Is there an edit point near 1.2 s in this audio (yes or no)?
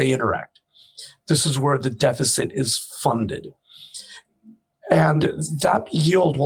no